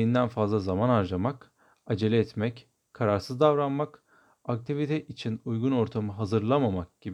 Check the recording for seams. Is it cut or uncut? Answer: uncut